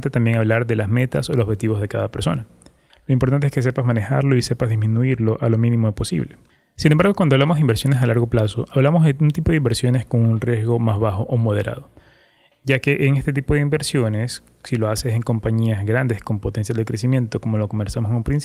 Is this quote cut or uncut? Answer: cut